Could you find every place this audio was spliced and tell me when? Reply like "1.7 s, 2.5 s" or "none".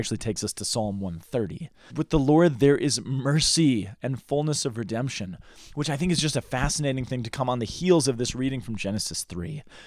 1.9 s